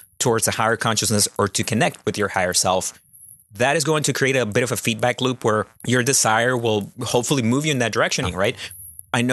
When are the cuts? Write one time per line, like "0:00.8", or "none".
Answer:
0:05.7
0:08.2